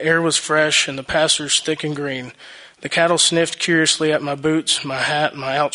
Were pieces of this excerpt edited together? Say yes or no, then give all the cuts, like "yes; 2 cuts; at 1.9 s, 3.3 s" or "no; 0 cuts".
no; 0 cuts